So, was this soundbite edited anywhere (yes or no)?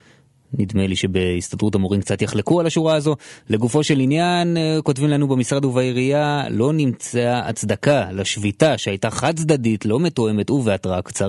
no